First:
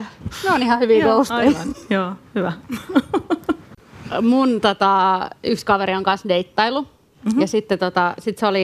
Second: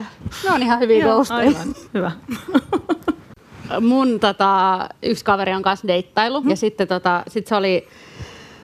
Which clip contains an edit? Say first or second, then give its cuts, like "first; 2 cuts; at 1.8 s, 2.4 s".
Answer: second; 2 cuts; at 1.9 s, 6.4 s